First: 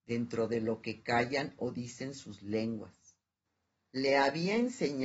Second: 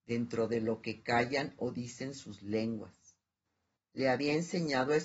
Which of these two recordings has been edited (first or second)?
second